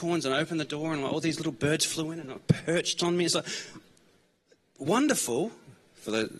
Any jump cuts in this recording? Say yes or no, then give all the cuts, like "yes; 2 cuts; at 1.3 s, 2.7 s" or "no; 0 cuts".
no; 0 cuts